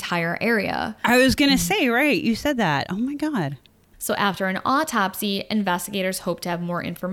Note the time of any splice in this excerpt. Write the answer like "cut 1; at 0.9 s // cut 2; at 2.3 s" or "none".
cut 1; at 3.9 s